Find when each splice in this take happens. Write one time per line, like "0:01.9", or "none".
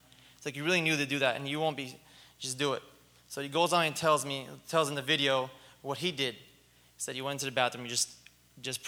none